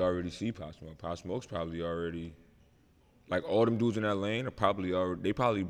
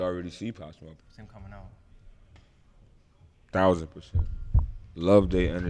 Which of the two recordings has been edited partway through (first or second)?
second